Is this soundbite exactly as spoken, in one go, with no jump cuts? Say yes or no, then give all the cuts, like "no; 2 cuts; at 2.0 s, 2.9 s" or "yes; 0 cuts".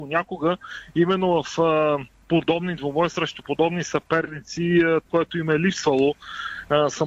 no; 1 cut; at 5.1 s